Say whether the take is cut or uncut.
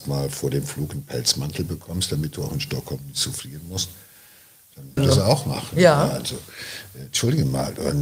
cut